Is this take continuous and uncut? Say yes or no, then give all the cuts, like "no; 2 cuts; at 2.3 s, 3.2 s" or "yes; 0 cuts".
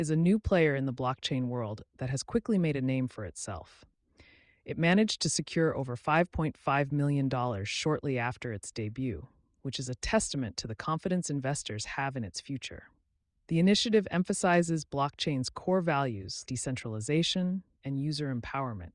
no; 2 cuts; at 16.4 s, 17.8 s